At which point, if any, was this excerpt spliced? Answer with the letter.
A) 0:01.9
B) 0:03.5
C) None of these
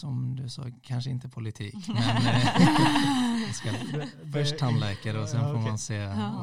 C